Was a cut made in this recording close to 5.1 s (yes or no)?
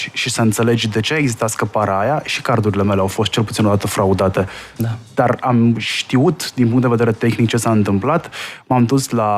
no